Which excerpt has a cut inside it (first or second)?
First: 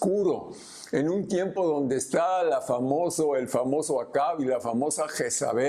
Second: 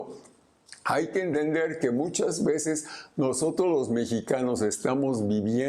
second